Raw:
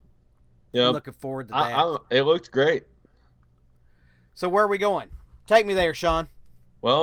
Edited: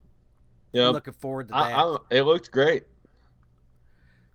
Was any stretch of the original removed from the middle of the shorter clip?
no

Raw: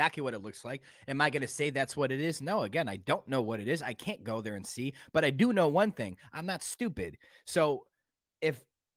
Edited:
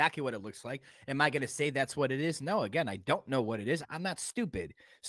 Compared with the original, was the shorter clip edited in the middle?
yes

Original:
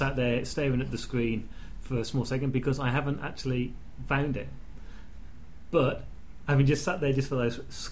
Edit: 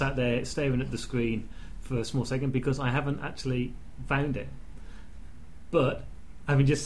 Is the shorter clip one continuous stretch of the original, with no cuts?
yes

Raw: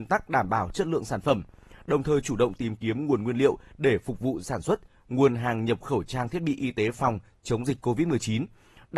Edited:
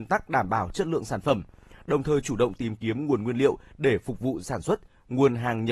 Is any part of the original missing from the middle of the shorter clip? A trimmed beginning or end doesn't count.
no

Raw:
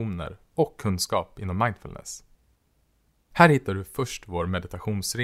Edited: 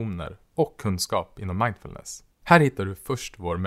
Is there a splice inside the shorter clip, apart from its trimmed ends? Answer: yes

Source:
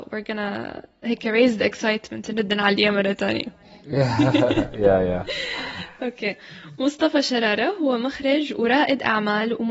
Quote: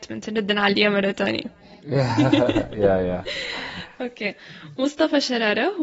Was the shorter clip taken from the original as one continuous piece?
yes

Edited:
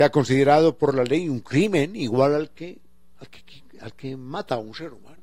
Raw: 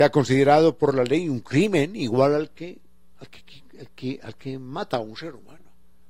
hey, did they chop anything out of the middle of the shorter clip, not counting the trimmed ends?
yes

